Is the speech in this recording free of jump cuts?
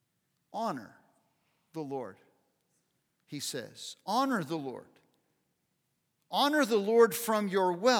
yes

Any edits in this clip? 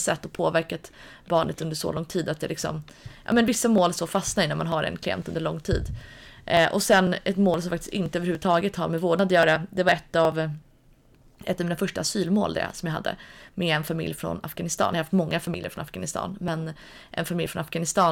no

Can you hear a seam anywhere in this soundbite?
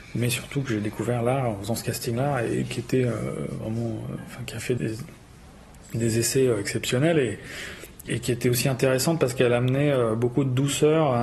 yes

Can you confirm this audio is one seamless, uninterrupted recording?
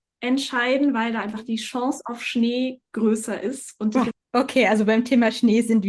no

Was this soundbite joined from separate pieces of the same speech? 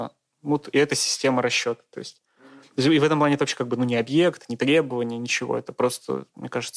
no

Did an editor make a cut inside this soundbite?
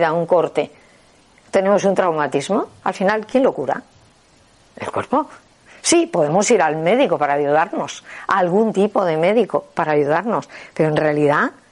no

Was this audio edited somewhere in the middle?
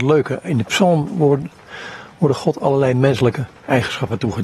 no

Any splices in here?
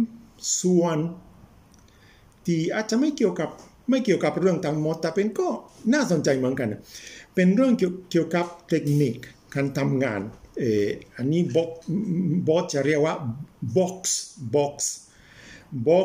no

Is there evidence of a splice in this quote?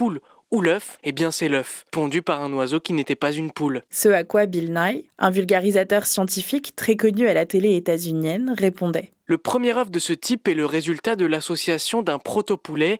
no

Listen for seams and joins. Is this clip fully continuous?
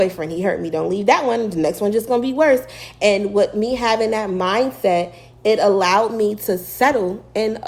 yes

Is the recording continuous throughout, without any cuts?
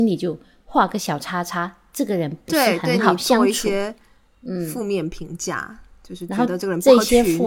yes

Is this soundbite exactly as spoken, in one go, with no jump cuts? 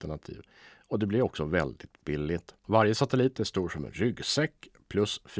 no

